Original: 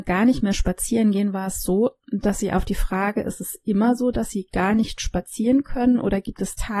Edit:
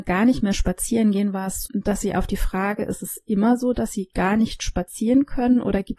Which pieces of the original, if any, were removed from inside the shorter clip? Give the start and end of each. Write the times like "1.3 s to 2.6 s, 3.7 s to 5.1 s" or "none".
1.6 s to 2.0 s